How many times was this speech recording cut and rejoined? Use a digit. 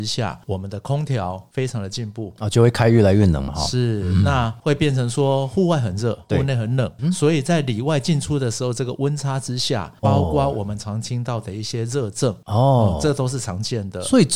1